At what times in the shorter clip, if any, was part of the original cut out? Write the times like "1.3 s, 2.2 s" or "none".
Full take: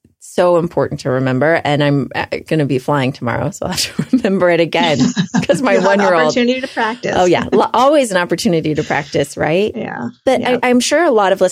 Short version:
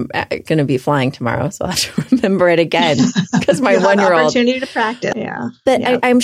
5.1 s